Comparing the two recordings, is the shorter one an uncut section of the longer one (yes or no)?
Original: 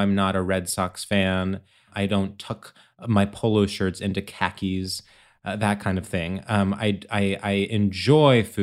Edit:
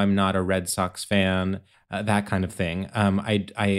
no